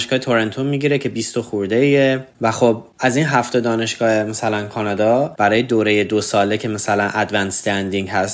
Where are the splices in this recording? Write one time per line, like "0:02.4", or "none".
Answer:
0:02.3